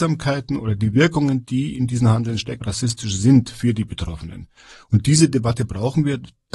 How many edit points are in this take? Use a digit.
1